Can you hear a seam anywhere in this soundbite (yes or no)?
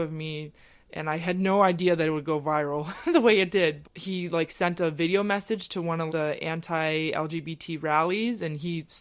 yes